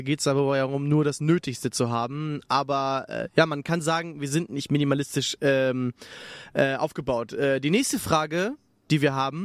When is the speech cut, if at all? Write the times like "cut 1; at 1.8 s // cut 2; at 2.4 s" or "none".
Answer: none